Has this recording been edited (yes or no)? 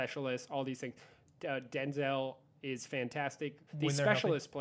yes